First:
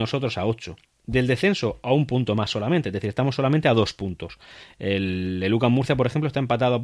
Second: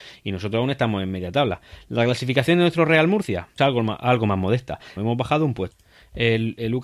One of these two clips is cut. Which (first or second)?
second